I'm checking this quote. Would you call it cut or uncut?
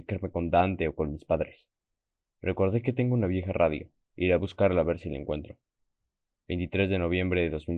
uncut